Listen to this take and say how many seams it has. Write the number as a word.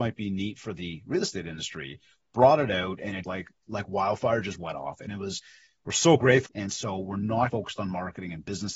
three